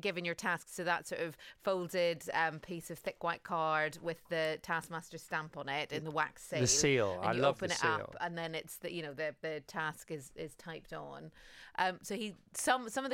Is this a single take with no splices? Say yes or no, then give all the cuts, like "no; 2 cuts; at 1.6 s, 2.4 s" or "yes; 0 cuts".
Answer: yes; 0 cuts